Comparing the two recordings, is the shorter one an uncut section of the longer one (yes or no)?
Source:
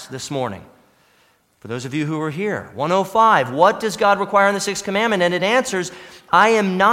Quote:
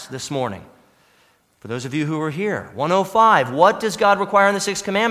yes